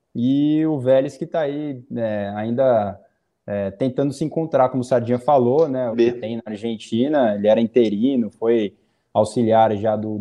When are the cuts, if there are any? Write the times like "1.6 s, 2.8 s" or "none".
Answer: 5.9 s